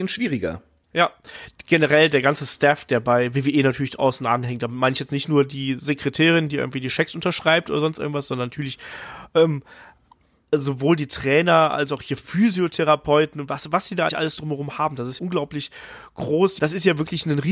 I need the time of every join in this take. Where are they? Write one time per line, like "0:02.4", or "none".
0:14.1
0:15.2
0:16.6